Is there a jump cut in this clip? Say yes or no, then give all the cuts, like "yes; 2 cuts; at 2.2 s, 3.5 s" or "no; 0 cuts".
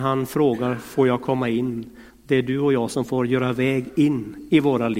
no; 0 cuts